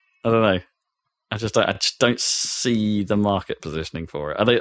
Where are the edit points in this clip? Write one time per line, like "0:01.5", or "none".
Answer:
none